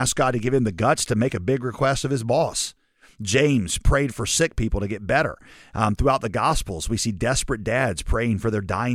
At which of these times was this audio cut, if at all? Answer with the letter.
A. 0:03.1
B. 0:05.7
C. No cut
C